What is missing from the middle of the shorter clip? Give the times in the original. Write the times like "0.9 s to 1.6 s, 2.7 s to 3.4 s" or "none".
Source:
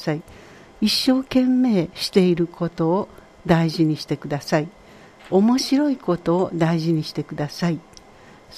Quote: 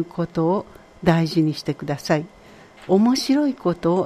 none